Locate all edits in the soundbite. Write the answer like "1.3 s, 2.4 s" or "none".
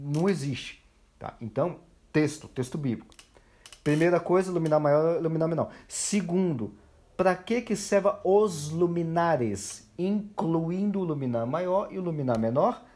none